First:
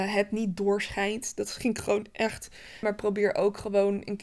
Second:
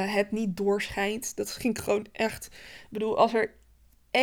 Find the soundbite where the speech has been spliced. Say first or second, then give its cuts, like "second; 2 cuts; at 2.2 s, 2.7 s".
first; 1 cut; at 2.8 s